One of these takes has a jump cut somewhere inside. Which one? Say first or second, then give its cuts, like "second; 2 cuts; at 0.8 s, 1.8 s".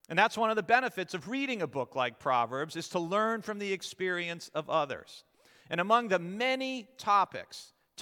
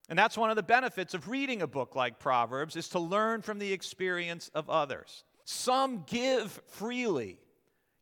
second; 1 cut; at 5.4 s